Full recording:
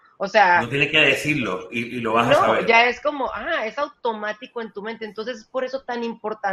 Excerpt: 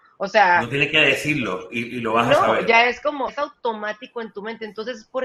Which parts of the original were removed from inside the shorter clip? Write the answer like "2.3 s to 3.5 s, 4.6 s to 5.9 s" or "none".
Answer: 3.3 s to 3.7 s